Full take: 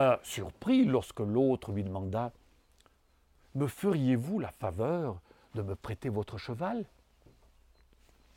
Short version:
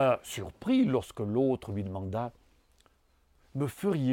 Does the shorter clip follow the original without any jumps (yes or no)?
yes